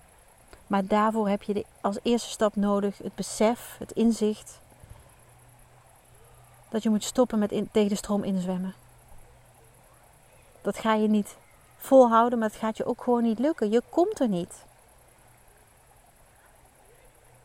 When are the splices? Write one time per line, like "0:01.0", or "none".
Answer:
none